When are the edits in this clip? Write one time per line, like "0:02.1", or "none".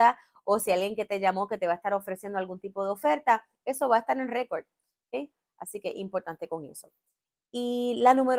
none